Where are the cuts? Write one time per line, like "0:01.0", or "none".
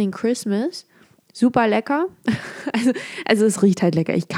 none

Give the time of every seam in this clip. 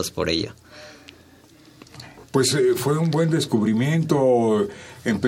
none

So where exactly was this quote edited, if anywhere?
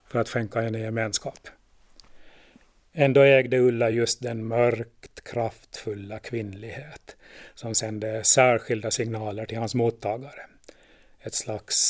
none

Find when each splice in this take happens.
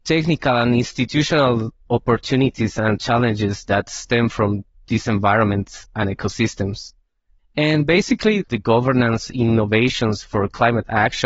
0:07.4
0:08.4

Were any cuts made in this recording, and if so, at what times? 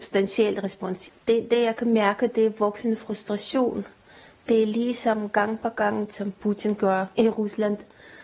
0:01.1
0:06.1
0:07.1

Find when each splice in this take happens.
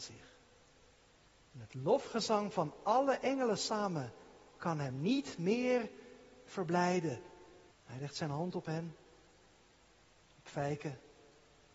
0:07.7

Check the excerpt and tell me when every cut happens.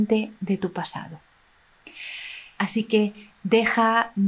0:02.6

